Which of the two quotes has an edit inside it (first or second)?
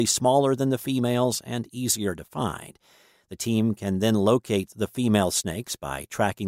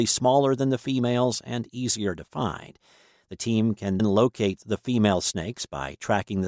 second